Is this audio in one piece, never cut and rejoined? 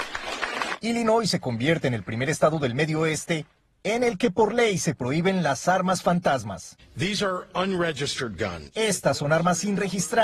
yes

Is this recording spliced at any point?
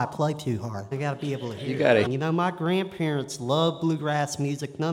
yes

